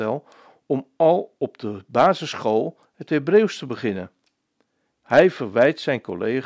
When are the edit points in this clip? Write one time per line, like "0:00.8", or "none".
0:04.9